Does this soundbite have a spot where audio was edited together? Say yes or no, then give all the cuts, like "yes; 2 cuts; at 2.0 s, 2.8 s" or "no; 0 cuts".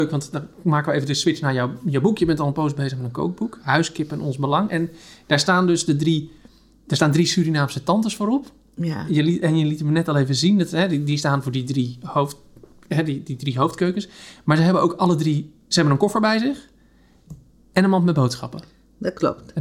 no; 0 cuts